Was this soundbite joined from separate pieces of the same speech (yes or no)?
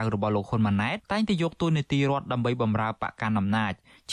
yes